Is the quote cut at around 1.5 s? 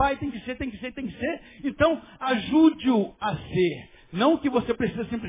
no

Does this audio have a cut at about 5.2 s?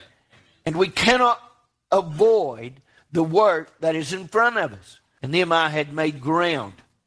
yes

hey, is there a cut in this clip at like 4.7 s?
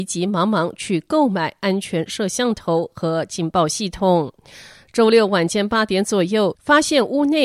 no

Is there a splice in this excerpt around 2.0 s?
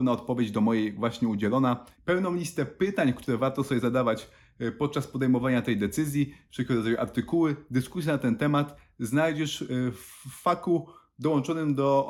yes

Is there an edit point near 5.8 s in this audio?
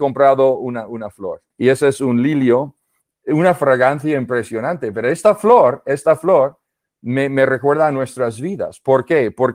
no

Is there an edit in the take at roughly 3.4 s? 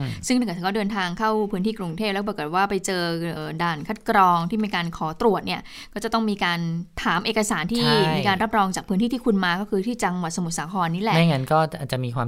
yes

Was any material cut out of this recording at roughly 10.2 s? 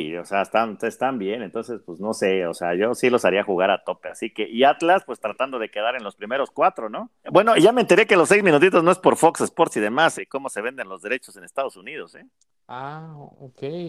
yes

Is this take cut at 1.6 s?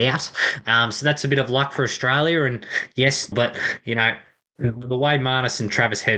no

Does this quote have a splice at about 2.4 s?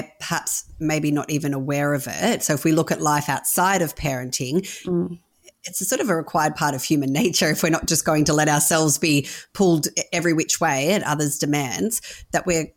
no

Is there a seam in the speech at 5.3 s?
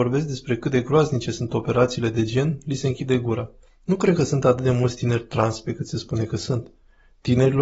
no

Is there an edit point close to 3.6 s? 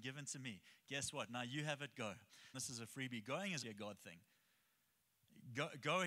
yes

